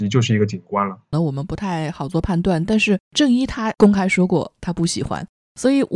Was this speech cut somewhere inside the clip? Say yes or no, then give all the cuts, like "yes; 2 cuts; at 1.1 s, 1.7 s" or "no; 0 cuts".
yes; 1 cut; at 1.1 s